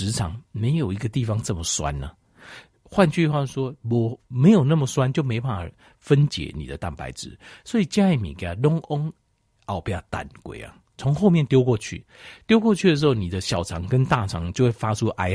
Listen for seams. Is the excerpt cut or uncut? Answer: uncut